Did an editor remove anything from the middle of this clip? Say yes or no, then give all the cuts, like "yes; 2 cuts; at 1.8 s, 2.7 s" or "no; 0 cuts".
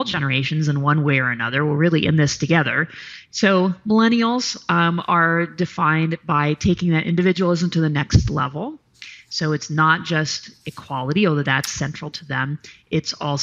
yes; 1 cut; at 3.2 s